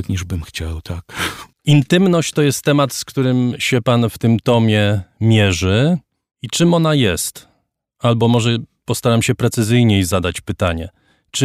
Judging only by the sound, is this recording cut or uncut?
cut